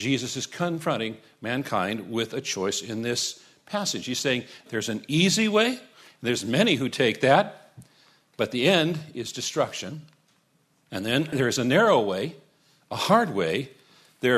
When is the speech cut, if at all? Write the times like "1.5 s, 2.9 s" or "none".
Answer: 4.7 s